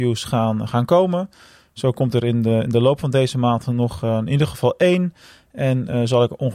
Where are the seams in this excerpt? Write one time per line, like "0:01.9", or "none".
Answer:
none